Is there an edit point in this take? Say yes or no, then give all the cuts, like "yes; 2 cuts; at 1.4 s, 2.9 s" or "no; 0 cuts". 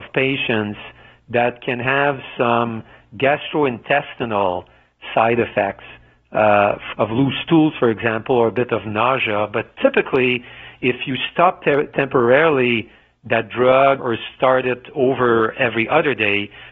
yes; 2 cuts; at 6.9 s, 14.0 s